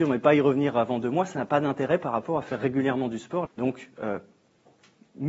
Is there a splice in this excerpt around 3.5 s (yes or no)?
yes